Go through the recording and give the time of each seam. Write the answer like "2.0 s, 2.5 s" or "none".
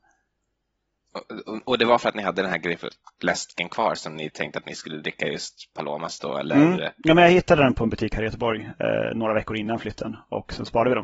none